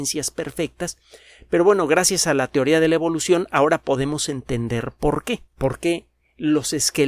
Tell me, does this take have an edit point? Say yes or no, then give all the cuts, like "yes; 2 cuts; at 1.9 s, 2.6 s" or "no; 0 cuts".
yes; 1 cut; at 5.5 s